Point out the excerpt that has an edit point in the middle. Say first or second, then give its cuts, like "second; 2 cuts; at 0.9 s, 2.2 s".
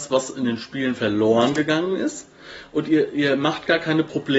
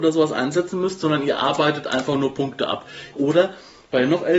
second; 1 cut; at 3.1 s